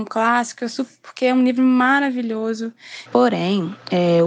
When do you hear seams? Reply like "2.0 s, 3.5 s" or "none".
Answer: 1.0 s, 3.1 s